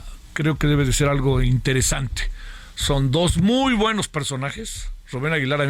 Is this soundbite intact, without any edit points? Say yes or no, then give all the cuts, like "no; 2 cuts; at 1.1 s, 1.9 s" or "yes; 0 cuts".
yes; 0 cuts